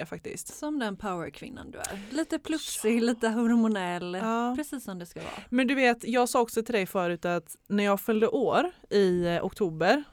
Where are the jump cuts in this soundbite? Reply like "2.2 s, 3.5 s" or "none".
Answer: none